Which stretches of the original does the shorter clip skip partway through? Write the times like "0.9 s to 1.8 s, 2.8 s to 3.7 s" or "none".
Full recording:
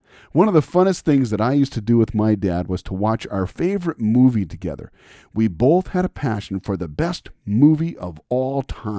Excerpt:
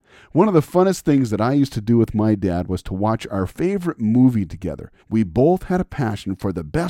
5.0 s to 5.2 s

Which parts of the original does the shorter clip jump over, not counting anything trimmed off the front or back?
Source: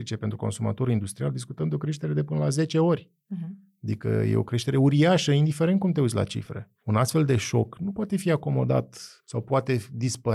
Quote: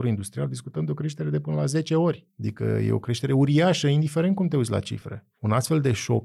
3.1 s to 3.7 s

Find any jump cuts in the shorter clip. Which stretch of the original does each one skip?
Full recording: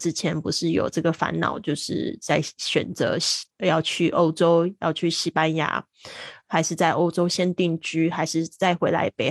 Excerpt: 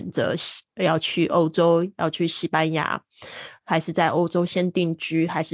none

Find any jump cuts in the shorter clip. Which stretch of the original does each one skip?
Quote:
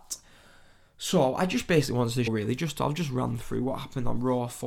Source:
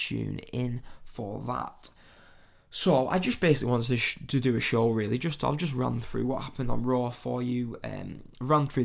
4.0 s to 4.9 s

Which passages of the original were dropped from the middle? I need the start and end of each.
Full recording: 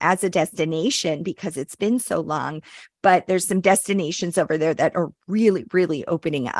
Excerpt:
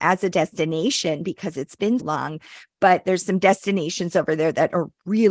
2.0 s to 2.2 s

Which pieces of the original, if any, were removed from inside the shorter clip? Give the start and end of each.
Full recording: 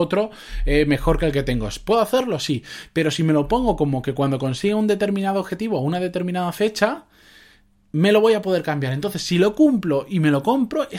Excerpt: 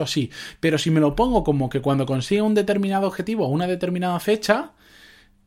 none

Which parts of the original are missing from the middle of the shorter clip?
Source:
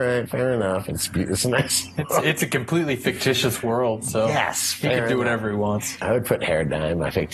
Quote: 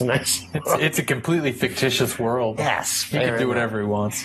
4.0 s to 4.3 s

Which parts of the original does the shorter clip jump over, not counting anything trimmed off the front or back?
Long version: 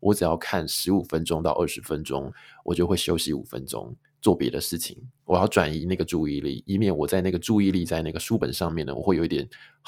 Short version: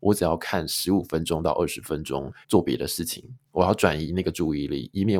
2.4 s to 4.1 s

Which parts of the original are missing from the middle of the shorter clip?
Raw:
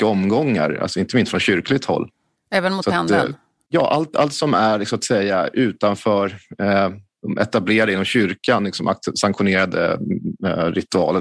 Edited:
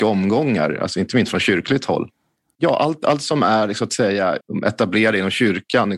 2.4 s to 3.6 s, 5.5 s to 7.1 s

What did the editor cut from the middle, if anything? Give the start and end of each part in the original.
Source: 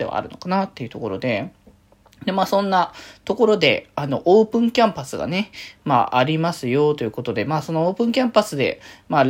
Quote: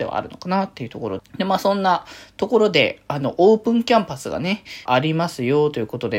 1.2 s to 2.1 s, 5.7 s to 6.1 s

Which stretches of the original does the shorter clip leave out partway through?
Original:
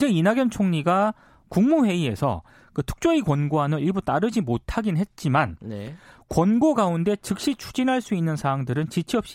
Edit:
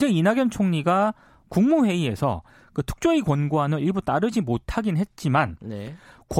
none

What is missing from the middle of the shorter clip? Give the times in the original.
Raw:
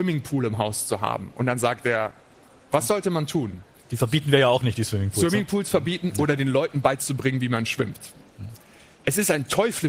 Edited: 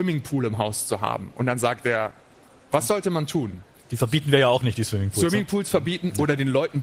none

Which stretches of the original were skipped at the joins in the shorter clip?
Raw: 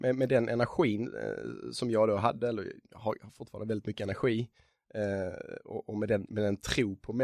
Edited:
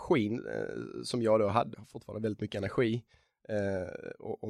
2.4 s to 3.2 s

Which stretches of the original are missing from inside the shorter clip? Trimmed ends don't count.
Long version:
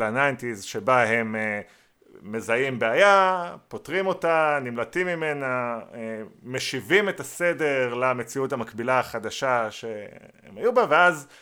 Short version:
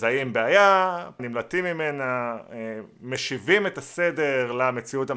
3.7 s to 4.6 s

